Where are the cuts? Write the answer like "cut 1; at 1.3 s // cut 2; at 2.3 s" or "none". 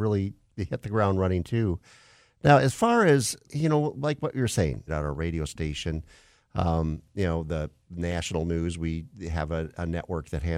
cut 1; at 3.4 s // cut 2; at 4.9 s